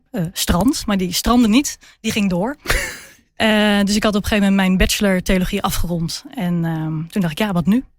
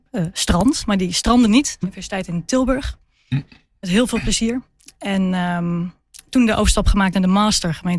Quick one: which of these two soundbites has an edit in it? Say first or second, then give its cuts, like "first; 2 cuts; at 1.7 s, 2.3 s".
second; 1 cut; at 1.8 s